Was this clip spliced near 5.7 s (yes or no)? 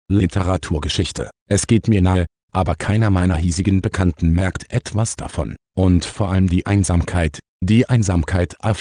yes